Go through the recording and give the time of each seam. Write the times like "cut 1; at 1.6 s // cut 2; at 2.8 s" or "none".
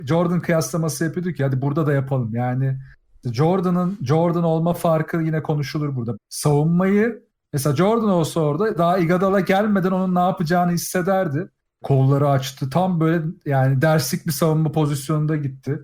cut 1; at 6.1 s // cut 2; at 11.8 s